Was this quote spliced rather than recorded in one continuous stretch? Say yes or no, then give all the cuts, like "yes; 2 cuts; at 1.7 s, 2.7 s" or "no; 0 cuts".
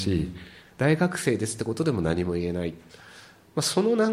no; 0 cuts